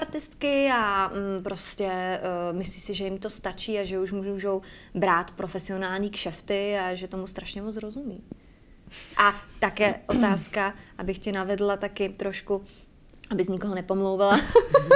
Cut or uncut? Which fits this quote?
cut